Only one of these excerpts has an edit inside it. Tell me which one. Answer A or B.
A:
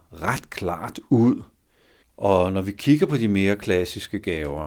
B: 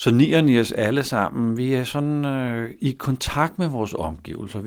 A